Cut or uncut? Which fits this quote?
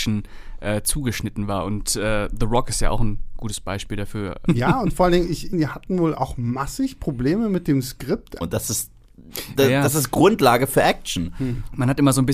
cut